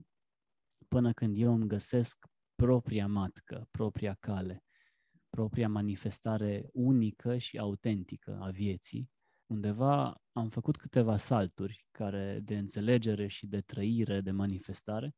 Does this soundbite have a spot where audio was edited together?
yes; 2 cuts; at 9.4 s, 12.4 s

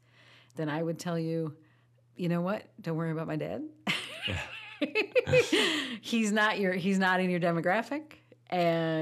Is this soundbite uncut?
yes; 0 cuts

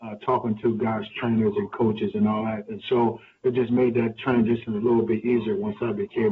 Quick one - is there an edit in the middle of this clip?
no; 0 cuts

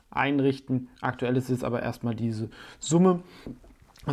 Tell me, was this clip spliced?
no; 0 cuts

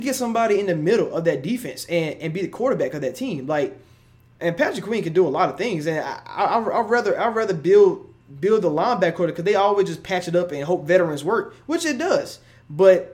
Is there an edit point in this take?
no; 0 cuts

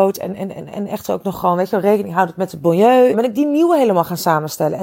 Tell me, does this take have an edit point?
yes; 1 cut; at 3.1 s

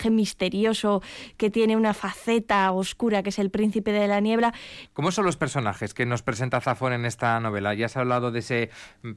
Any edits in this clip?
yes; 1 cut; at 4.9 s

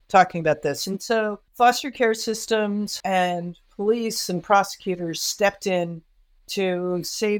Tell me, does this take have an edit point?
yes; 2 cuts; at 1.5 s, 3.0 s

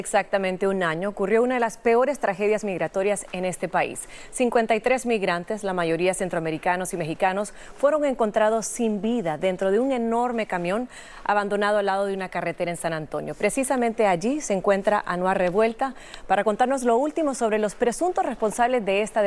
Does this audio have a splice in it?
no; 0 cuts

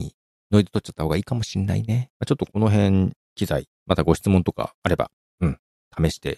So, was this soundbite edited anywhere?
yes; 2 cuts; at 2.1 s, 3.7 s

